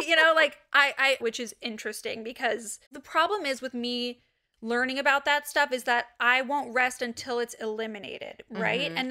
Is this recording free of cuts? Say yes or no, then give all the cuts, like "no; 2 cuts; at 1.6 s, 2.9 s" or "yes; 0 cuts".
no; 2 cuts; at 1.2 s, 2.9 s